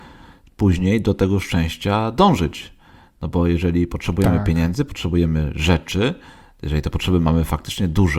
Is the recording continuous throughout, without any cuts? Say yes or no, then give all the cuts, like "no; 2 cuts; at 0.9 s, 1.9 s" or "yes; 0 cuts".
yes; 0 cuts